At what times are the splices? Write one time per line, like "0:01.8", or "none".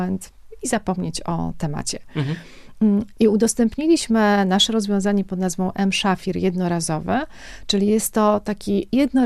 0:03.1